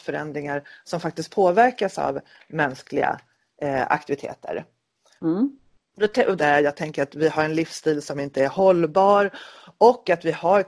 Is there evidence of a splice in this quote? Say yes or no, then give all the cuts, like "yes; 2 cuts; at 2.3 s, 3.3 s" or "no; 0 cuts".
yes; 2 cuts; at 5.2 s, 6.4 s